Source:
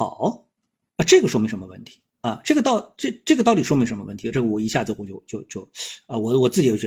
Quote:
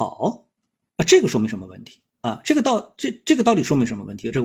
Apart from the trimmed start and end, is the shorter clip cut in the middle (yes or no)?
no